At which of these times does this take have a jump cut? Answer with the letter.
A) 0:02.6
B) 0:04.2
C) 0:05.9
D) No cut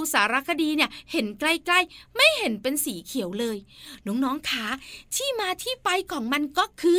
D